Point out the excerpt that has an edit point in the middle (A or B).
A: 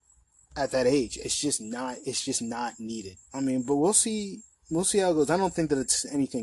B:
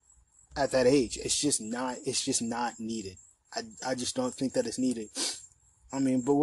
A